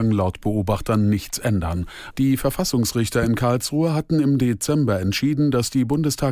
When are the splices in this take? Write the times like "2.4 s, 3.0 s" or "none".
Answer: none